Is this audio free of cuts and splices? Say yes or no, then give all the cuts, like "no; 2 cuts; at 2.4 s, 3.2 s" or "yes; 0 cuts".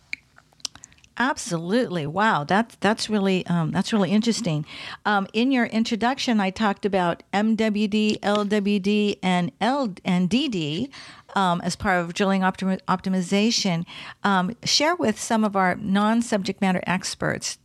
yes; 0 cuts